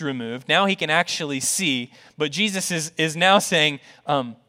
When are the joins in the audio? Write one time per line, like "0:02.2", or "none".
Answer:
none